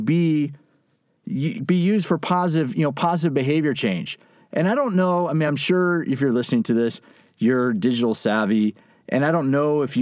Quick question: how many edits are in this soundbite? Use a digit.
0